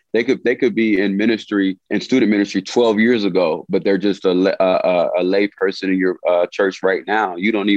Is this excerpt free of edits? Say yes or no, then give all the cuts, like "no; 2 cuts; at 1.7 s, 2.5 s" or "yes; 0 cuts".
no; 1 cut; at 1.8 s